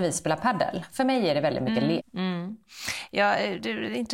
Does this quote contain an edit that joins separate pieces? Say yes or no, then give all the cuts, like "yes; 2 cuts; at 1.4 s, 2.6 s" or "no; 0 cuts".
yes; 1 cut; at 2.0 s